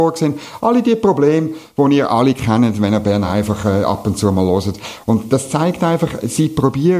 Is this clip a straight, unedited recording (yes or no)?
yes